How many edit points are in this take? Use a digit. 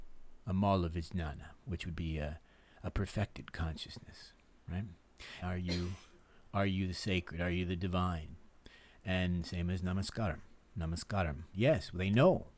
2